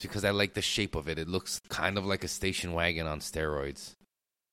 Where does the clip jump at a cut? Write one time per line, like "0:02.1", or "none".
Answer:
0:01.6